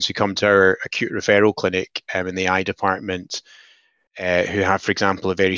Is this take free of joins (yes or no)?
yes